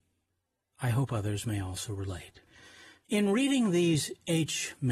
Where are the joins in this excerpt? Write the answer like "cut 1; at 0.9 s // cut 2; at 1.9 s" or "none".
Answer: none